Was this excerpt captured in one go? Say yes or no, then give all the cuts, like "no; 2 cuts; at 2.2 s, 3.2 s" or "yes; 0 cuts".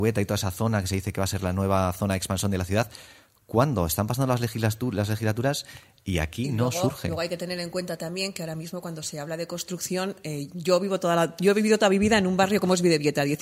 yes; 0 cuts